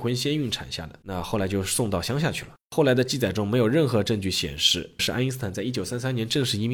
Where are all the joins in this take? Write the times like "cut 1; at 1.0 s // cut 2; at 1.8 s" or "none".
cut 1; at 1.0 s // cut 2; at 5.0 s